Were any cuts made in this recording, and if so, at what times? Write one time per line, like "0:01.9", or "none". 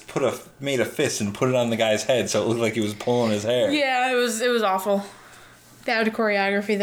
none